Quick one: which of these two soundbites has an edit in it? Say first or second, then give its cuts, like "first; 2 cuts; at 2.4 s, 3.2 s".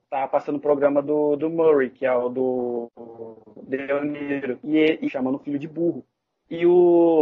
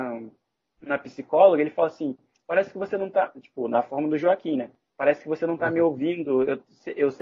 first; 1 cut; at 5.1 s